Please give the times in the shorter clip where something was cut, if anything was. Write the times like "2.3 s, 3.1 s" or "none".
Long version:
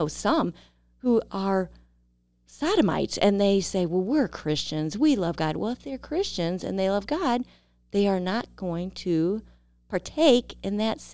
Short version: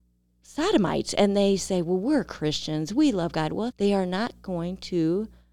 3.7 s